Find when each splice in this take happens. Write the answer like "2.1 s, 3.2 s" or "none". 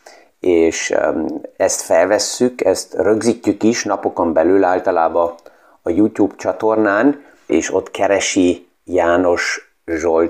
7.5 s, 8.8 s

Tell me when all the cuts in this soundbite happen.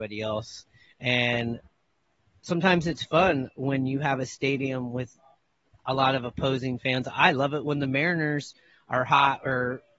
none

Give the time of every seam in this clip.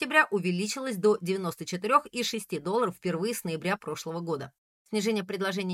4.8 s

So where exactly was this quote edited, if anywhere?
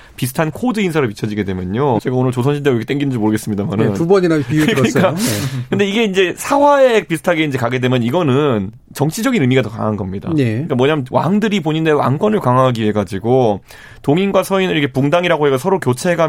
2.0 s

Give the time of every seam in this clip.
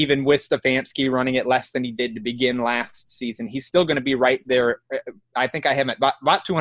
none

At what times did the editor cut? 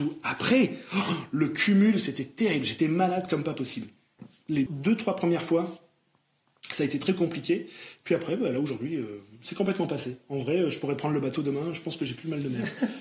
4.7 s

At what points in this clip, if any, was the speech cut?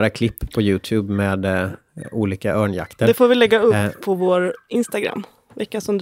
none

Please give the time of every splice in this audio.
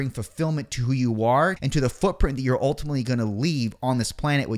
1.6 s

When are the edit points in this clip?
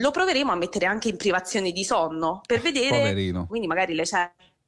3.5 s

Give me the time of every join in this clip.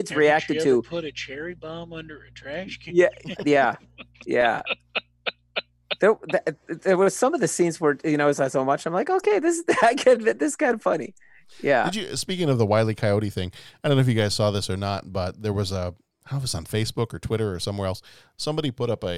3.4 s

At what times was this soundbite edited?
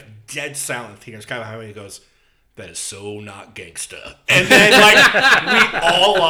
none

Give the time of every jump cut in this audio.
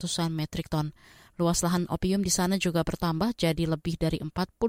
none

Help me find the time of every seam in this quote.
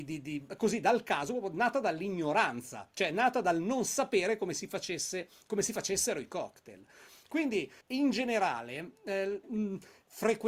7.8 s, 9.4 s

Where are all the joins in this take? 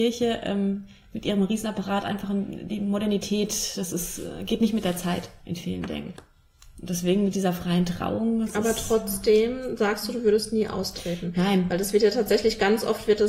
none

